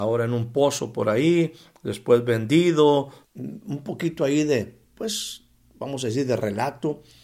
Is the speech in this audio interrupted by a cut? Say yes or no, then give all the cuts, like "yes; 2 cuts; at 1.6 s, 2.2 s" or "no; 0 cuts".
yes; 2 cuts; at 3.2 s, 4.9 s